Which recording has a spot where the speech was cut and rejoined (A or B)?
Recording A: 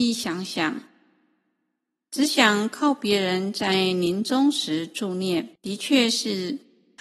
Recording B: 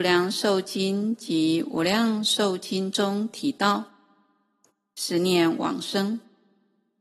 A